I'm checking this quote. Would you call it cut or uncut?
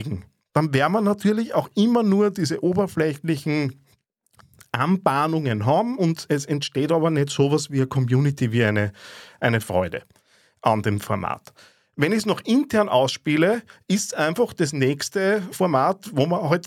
uncut